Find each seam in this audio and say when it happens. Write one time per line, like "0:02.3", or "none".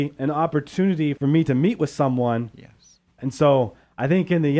0:03.1